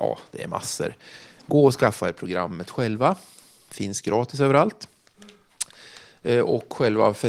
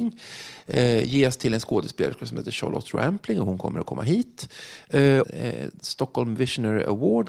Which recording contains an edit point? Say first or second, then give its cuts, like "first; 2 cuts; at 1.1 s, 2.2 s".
second; 1 cut; at 5.2 s